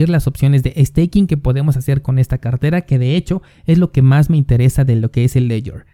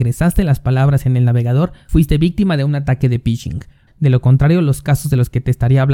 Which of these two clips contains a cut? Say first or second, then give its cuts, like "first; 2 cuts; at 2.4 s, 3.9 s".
second; 1 cut; at 3.9 s